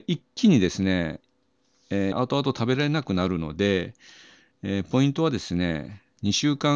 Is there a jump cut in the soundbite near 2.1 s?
yes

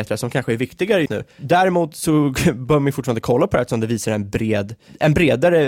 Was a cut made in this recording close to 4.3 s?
no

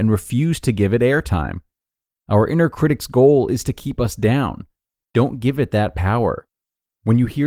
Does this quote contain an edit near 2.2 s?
no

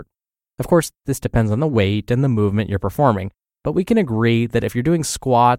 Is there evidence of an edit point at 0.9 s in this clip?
no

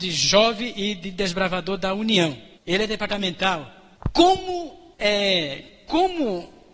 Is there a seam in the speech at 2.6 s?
yes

